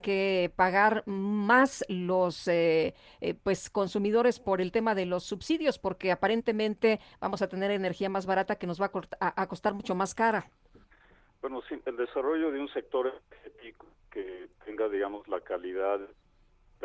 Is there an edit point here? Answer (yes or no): no